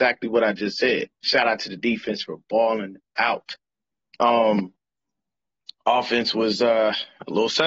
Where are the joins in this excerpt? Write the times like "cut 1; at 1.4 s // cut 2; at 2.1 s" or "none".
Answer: cut 1; at 1.1 s